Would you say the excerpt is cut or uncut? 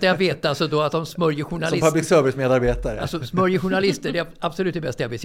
uncut